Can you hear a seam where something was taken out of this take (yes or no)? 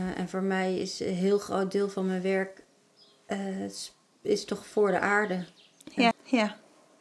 yes